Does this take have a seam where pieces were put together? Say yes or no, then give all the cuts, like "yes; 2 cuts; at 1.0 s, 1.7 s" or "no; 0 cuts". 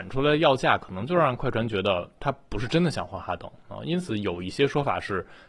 no; 0 cuts